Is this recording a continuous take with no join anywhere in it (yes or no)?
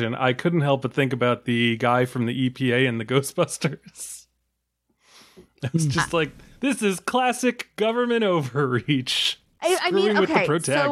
yes